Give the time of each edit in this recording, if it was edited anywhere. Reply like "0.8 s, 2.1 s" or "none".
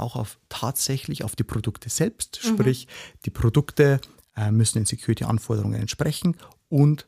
none